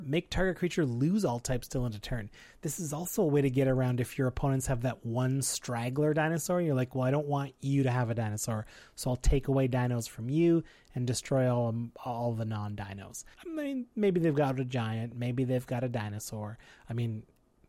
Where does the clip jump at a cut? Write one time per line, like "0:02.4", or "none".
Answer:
0:13.3